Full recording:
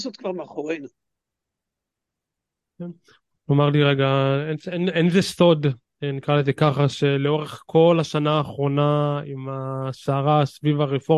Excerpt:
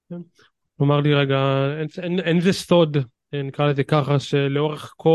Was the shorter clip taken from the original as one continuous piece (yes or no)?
yes